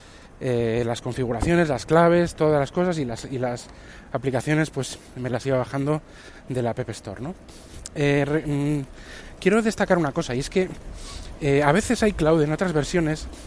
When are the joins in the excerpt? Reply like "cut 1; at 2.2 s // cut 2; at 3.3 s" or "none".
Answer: none